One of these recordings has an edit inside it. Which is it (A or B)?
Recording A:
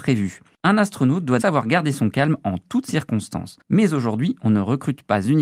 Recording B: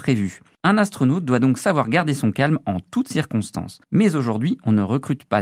A